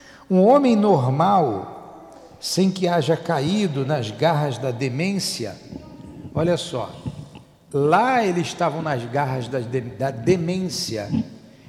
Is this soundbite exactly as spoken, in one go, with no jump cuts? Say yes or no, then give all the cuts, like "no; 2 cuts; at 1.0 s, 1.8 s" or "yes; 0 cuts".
yes; 0 cuts